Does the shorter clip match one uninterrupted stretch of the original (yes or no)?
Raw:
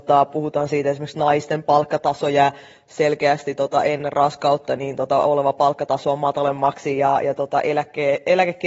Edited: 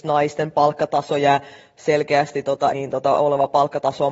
no